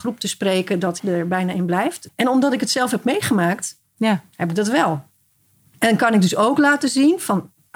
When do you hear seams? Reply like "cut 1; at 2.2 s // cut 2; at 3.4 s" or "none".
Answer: cut 1; at 1.0 s // cut 2; at 2.1 s